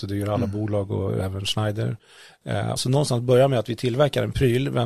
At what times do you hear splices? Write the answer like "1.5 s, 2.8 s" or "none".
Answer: 2.8 s